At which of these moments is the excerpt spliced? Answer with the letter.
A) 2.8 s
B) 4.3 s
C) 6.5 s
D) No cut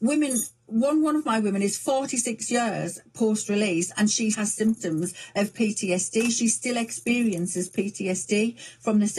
B